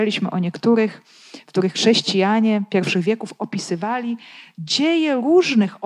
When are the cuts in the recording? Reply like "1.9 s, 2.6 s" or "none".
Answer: none